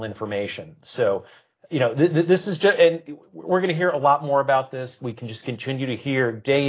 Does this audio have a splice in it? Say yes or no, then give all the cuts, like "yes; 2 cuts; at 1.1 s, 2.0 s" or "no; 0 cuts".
yes; 1 cut; at 5.0 s